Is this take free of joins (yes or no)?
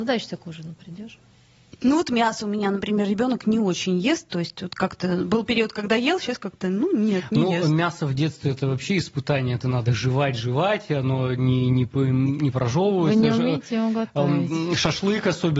yes